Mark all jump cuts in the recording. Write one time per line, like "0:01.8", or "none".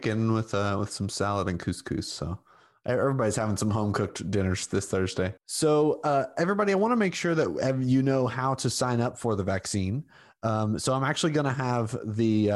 0:05.4

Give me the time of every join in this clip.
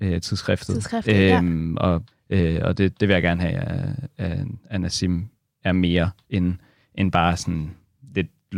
0:02.1

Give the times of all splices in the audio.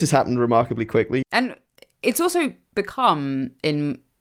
0:01.2

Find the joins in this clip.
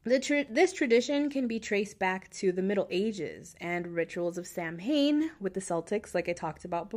none

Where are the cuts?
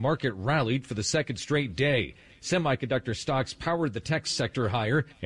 none

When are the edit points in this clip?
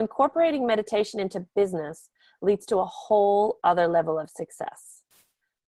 none

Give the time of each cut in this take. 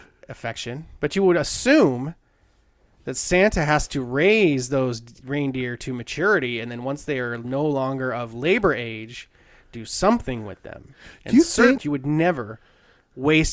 0:11.8

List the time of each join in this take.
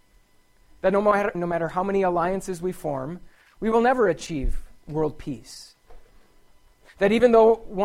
0:01.3

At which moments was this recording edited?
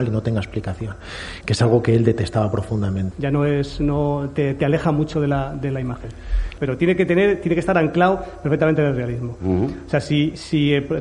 0:01.4
0:03.1
0:06.6

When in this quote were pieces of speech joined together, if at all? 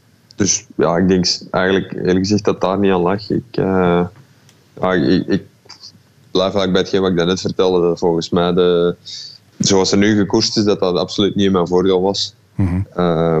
none

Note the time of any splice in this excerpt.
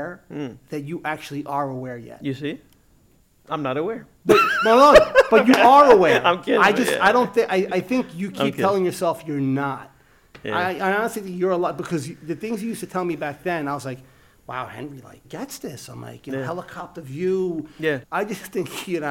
0:15.2
0:18.0

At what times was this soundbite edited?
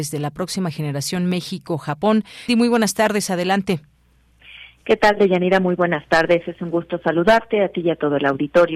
0:02.5

